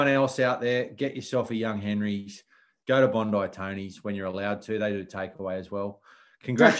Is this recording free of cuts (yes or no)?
yes